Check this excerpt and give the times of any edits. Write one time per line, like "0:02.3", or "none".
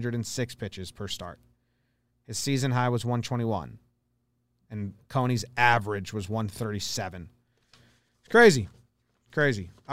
none